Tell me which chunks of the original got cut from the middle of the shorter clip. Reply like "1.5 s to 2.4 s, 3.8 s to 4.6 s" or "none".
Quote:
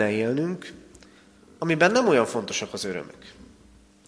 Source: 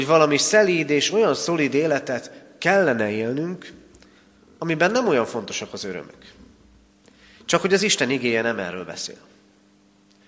none